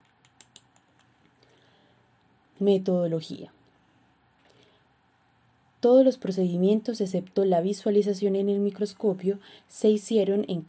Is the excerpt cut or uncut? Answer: uncut